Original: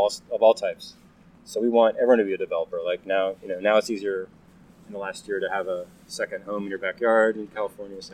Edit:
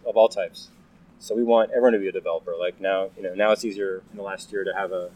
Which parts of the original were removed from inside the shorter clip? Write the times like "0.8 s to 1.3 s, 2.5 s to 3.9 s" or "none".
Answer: 4.3 s to 4.8 s